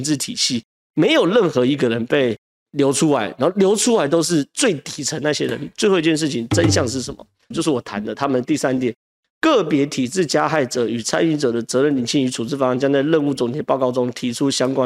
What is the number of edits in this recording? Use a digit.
1